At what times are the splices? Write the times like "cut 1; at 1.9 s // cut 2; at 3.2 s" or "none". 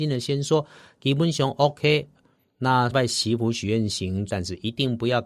cut 1; at 2.9 s // cut 2; at 4.3 s